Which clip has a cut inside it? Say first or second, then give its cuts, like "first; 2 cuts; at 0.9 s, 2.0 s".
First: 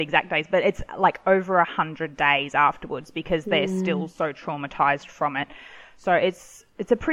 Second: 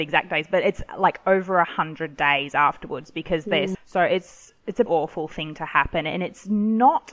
second; 2 cuts; at 3.7 s, 4.9 s